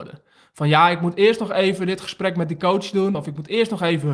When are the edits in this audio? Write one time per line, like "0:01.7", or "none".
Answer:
none